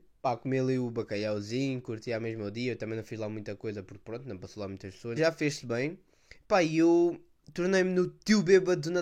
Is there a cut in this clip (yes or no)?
yes